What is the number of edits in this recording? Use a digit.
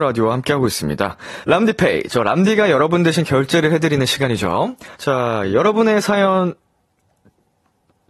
2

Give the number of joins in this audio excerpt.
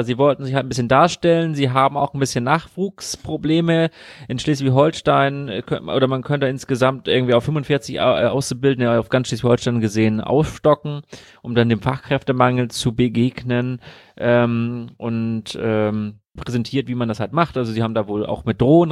1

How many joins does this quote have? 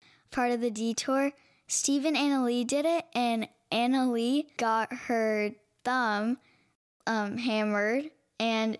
1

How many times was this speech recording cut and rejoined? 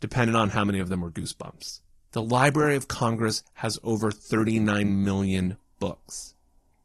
1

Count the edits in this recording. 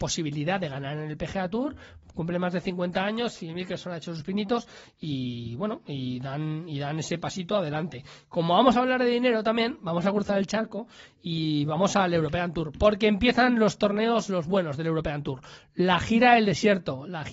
0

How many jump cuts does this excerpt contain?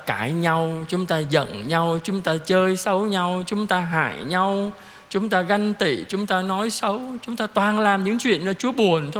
0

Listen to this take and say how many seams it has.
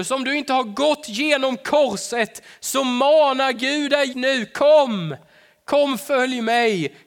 1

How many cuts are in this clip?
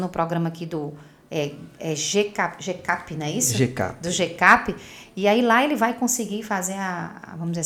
0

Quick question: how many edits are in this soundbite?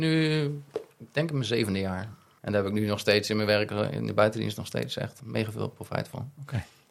2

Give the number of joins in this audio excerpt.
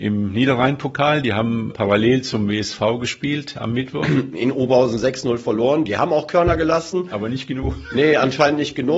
1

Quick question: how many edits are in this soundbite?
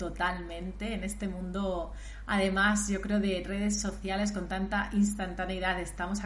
0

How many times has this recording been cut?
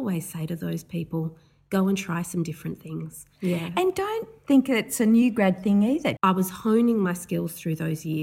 2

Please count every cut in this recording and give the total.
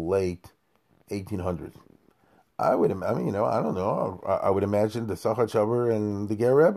0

